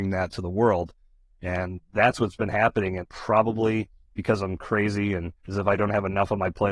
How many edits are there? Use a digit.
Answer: 2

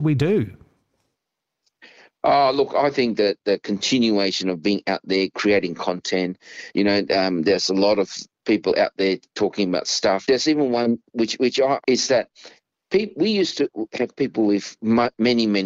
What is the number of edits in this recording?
2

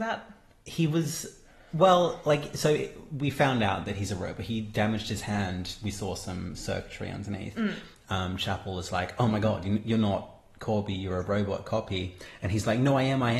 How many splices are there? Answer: 0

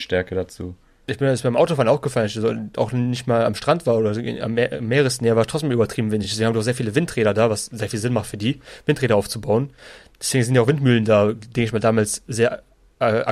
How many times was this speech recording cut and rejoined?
0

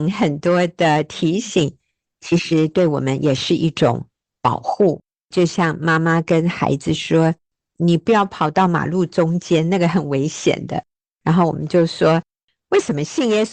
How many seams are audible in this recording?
0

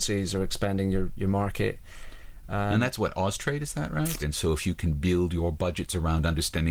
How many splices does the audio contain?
1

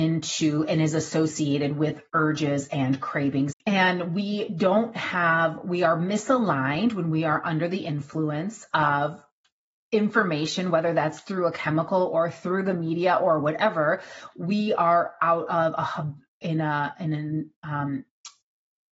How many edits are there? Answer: 1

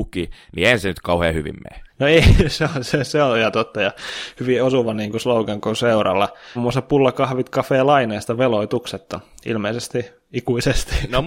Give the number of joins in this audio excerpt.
2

